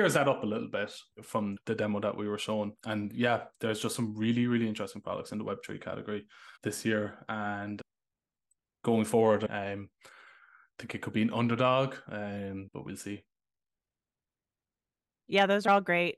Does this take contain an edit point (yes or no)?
yes